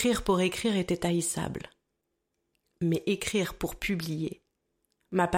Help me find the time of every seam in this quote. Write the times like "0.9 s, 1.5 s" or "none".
none